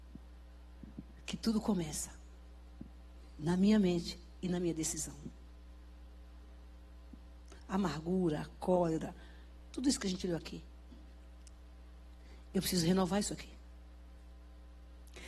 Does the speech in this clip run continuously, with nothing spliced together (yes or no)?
no